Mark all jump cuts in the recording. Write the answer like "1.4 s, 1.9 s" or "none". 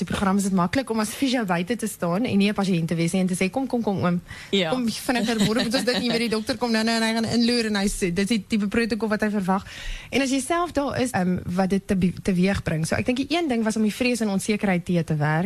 11.1 s